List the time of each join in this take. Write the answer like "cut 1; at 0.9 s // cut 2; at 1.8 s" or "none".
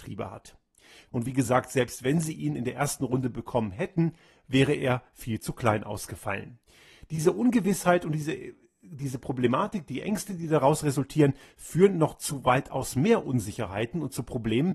cut 1; at 1.1 s

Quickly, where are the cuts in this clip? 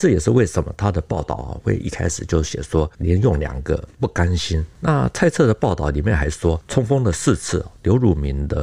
cut 1; at 6.6 s

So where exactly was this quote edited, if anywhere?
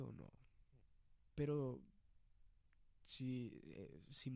none

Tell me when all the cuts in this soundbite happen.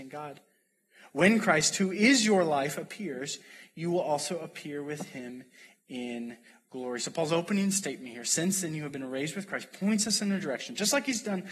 none

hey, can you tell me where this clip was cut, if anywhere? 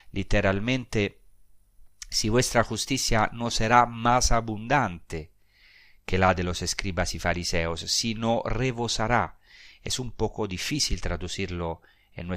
none

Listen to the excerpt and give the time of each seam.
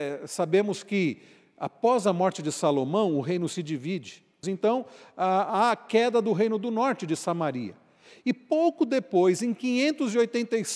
cut 1; at 4.4 s

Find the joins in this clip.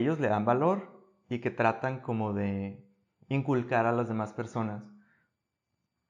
none

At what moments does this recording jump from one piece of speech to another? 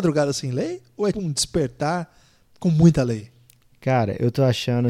cut 1; at 1.1 s

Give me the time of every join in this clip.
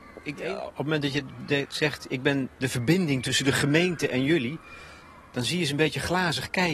none

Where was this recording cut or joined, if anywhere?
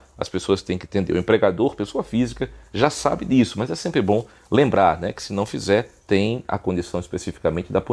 none

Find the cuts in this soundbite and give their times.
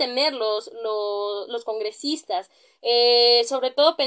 none

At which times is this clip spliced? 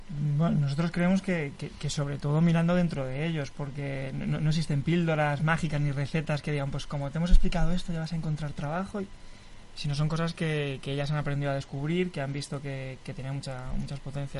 none

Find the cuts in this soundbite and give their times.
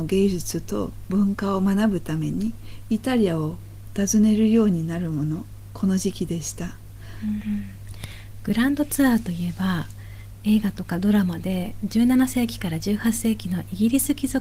cut 1; at 7.4 s

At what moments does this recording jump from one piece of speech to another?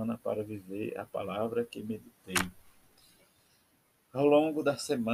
none

